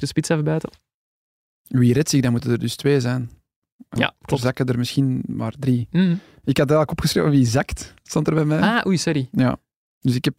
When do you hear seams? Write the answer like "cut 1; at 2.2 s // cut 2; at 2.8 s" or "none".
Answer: cut 1; at 4.0 s